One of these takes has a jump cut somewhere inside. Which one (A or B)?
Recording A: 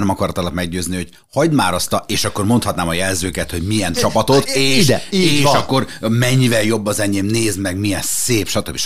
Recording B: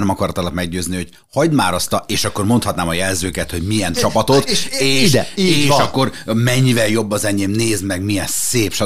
A